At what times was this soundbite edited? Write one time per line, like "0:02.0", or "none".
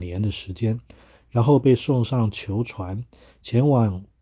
none